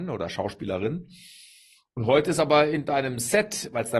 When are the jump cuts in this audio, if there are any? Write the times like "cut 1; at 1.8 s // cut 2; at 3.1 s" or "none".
none